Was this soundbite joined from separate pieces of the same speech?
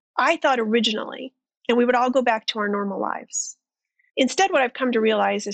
yes; 1 cut; at 1.5 s

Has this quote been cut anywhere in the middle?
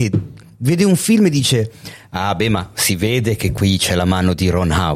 no; 0 cuts

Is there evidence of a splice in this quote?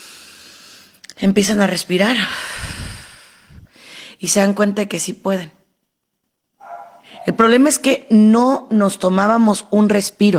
no; 0 cuts

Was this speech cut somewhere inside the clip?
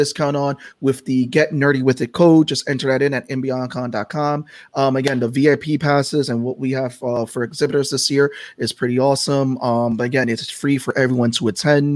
no; 0 cuts

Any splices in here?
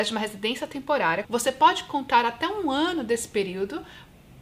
yes; 1 cut; at 1.2 s

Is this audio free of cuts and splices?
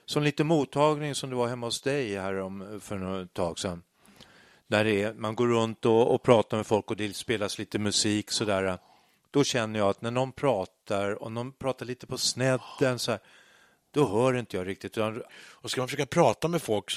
no; 1 cut; at 15.3 s

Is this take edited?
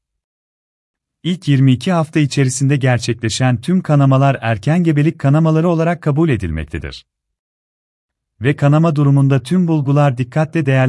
no; 0 cuts

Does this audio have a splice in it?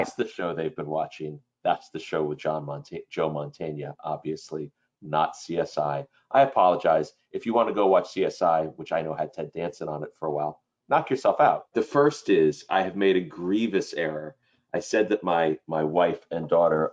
yes; 1 cut; at 11.7 s

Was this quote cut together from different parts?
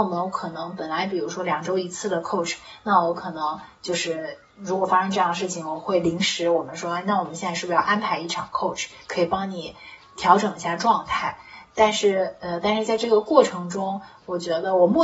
no; 0 cuts

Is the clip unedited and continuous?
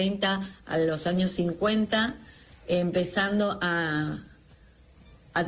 yes; 0 cuts

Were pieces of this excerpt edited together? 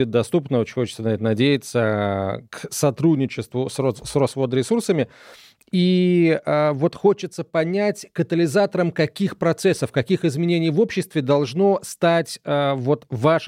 no; 0 cuts

